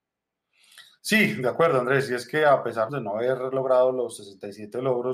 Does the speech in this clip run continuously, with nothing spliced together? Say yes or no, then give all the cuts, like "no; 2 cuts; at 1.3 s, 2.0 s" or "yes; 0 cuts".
no; 1 cut; at 2.9 s